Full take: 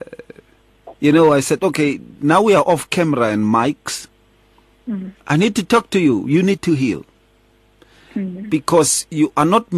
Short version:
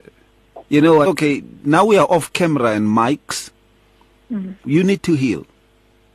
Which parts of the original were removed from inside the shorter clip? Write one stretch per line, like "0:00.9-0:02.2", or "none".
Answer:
0:01.3-0:01.6
0:05.2-0:06.2